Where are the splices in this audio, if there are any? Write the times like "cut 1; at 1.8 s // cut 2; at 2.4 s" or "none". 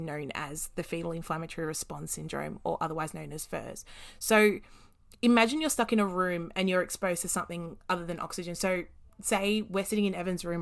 none